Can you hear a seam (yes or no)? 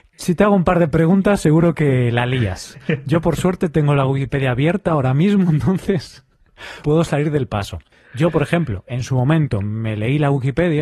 no